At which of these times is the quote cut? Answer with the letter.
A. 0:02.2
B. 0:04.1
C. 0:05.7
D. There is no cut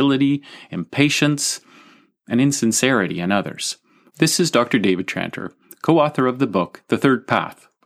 B